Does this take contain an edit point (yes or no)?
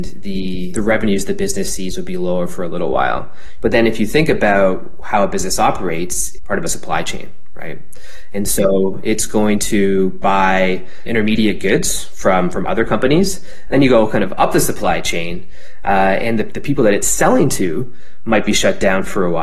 yes